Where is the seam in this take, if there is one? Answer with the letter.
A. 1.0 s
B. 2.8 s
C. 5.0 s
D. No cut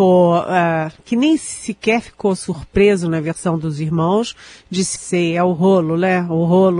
C